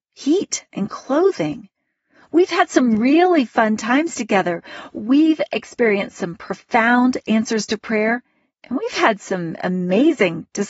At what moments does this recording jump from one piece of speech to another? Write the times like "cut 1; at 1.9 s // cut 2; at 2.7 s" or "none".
none